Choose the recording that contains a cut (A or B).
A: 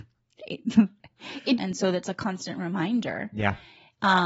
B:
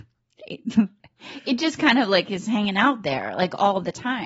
A